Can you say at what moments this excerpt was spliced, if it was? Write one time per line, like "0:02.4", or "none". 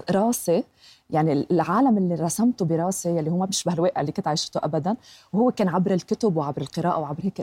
none